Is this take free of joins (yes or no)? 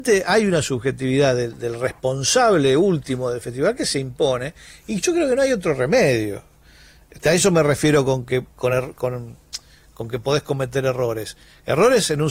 yes